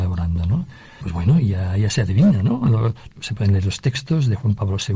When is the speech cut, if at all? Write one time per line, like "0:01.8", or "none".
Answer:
0:01.0
0:03.1

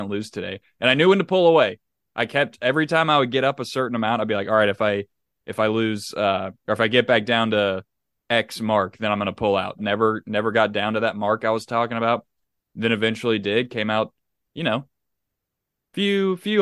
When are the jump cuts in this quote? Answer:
0:09.8

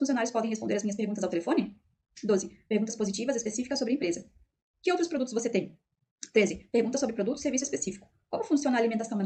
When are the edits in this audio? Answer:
none

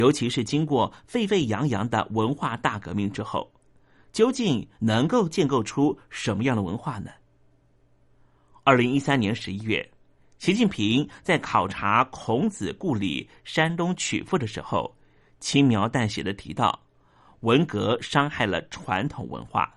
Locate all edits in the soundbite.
none

